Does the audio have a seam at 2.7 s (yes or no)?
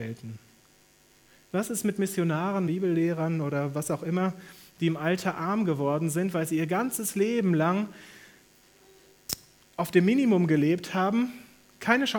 yes